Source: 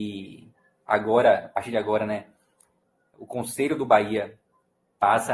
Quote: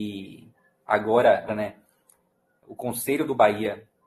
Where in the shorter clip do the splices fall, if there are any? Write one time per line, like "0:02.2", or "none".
0:01.5

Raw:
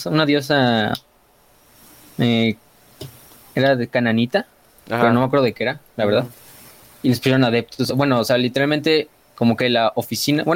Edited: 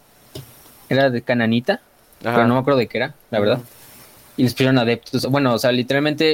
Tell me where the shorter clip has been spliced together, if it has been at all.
none

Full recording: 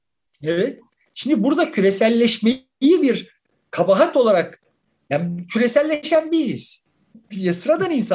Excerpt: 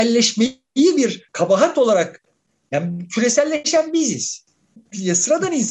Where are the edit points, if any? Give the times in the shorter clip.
0:01.3

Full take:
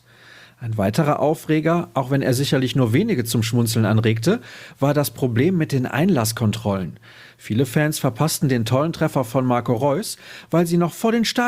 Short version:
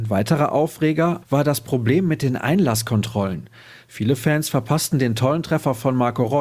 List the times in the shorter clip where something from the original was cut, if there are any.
0:01.2

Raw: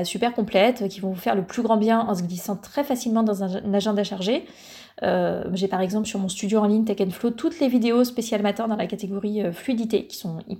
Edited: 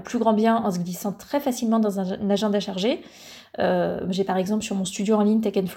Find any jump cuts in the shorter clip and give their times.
none

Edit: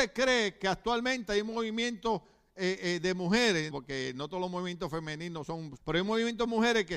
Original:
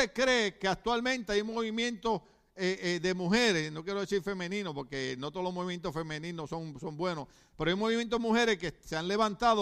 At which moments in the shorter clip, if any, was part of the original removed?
0:03.7
0:05.8

